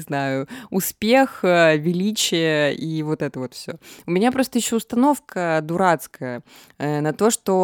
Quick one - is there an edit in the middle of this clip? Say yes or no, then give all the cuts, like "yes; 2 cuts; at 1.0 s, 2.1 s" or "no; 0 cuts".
no; 0 cuts